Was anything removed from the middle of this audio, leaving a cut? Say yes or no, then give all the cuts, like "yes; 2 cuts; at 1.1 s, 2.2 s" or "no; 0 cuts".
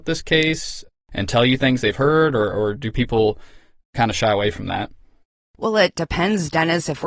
no; 0 cuts